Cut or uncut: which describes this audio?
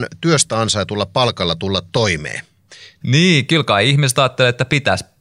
cut